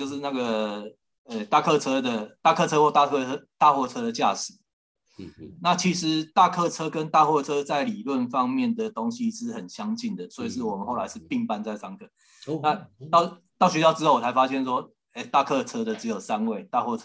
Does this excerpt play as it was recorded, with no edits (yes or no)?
no